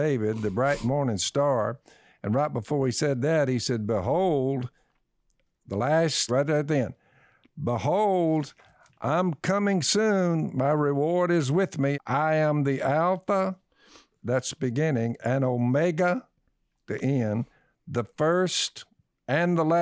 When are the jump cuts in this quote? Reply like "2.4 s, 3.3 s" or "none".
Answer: 6.3 s, 11.9 s